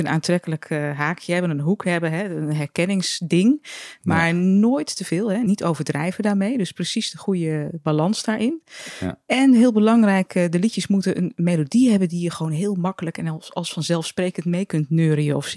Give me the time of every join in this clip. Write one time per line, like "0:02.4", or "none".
none